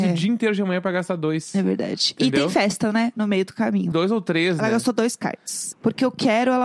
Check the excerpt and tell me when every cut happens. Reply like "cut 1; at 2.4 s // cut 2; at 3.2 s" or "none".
cut 1; at 3.9 s // cut 2; at 5.7 s